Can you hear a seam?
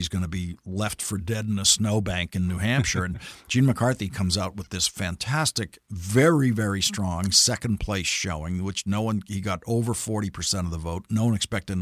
no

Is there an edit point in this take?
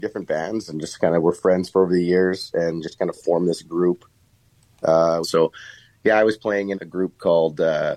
yes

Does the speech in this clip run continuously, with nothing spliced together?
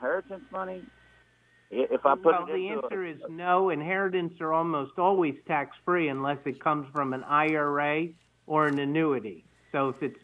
yes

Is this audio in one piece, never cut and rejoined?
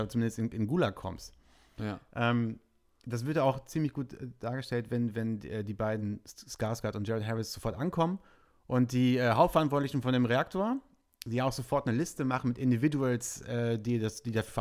yes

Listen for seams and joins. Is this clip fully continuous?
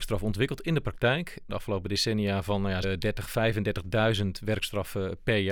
no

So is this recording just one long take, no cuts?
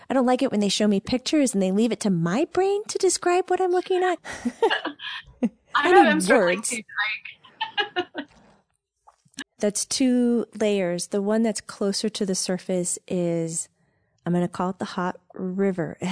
no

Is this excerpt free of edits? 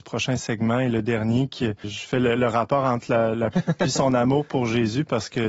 no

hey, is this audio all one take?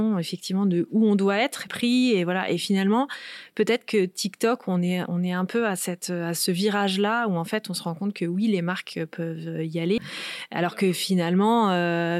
no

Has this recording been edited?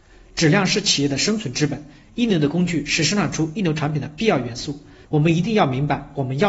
yes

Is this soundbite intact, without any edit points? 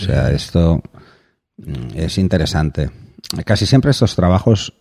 yes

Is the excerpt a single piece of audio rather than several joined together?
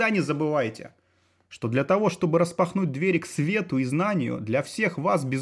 yes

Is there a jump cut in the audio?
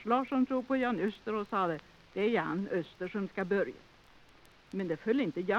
no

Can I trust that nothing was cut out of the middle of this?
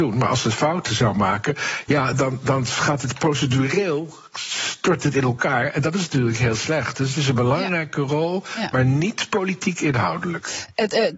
yes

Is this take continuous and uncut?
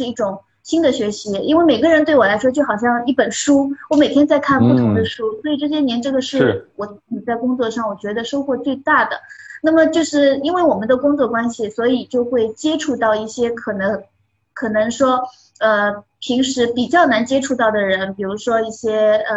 yes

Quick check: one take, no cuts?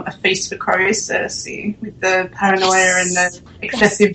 yes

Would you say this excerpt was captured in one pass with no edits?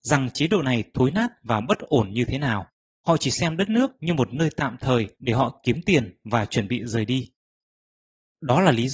no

